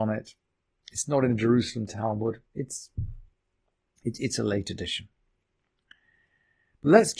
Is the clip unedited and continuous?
yes; 0 cuts

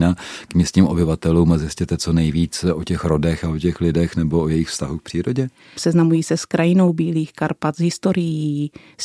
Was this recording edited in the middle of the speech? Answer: yes; 1 cut; at 5.8 s

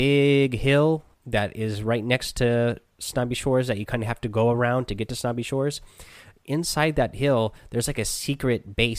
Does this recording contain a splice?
yes; 1 cut; at 1.1 s

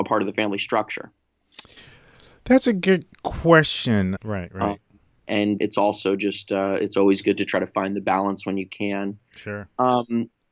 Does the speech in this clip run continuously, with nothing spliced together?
no; 2 cuts; at 4.2 s, 5.6 s

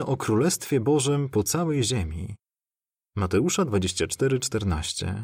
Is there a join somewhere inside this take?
no; 0 cuts

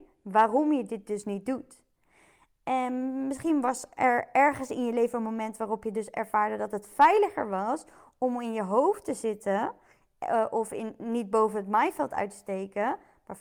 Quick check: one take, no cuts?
yes; 0 cuts

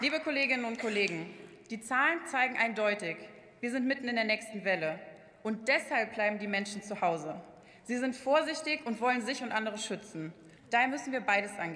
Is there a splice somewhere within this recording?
yes; 1 cut; at 10.6 s

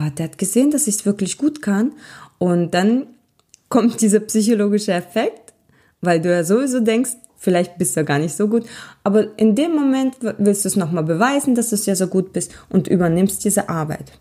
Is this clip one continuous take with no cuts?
no; 1 cut; at 7.3 s

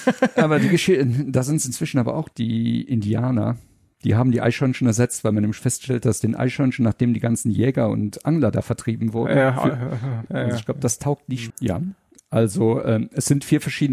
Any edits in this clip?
yes; 2 cuts; at 10.3 s, 11.5 s

